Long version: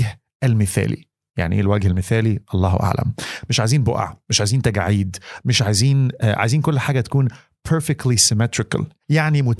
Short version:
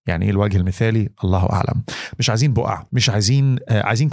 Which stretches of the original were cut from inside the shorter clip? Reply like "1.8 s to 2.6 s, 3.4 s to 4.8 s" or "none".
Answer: 4.2 s to 5.4 s